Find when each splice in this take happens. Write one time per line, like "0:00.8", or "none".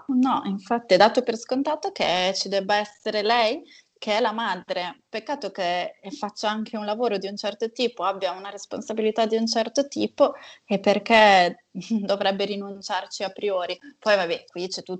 none